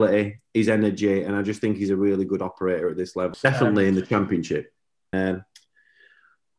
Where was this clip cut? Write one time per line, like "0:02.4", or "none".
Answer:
0:03.3
0:05.1